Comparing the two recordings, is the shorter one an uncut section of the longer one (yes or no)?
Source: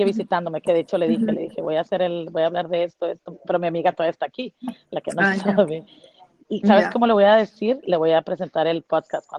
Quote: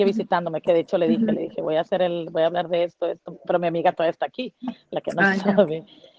yes